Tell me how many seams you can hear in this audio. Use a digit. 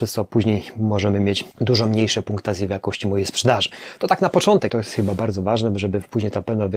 2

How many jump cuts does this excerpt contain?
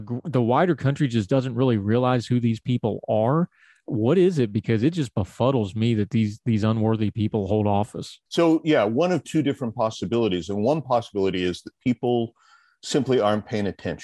1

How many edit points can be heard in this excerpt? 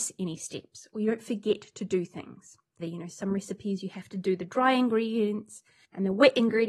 1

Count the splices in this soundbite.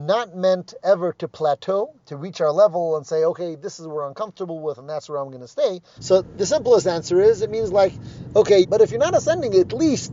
2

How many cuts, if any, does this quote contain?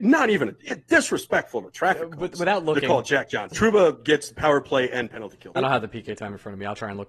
2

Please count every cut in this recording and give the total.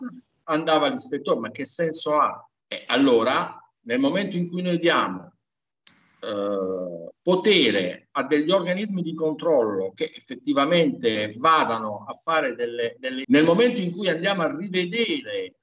2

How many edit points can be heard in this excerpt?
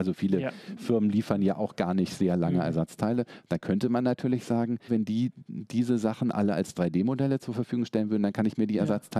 1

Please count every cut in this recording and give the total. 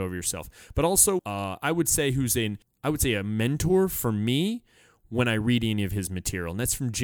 1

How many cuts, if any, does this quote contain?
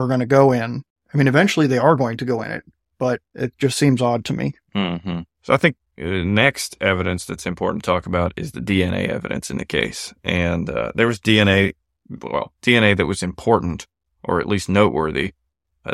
0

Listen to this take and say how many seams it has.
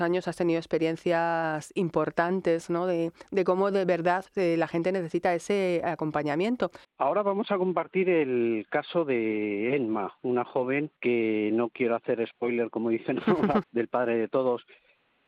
3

